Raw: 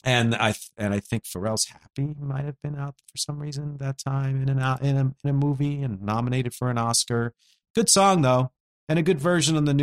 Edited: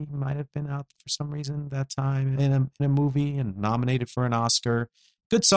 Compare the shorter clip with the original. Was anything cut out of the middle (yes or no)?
yes